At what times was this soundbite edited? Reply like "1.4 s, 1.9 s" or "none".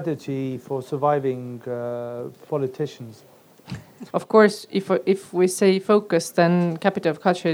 4.1 s